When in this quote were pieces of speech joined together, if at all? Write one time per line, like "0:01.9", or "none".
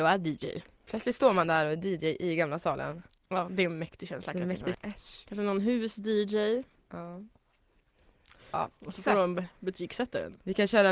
0:04.7
0:08.7